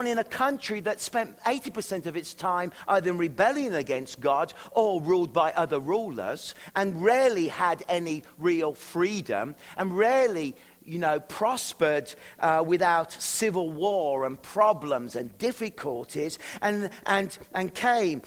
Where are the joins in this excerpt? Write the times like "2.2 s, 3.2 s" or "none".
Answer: none